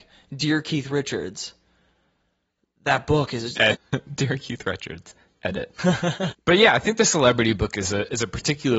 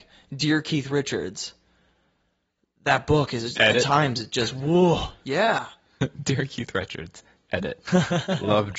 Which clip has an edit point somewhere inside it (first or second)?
first